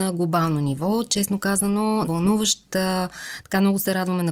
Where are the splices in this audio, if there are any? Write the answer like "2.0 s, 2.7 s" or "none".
2.0 s